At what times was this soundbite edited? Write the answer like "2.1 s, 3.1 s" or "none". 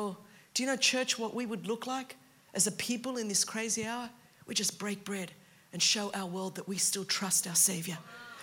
none